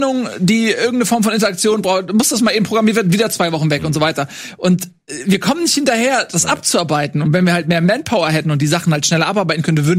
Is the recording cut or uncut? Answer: uncut